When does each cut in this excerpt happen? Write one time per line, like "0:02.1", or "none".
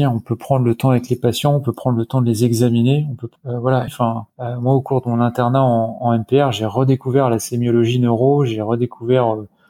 0:03.9